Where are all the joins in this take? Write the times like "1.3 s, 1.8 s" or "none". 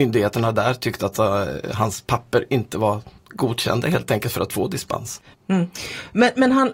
3.2 s, 5.3 s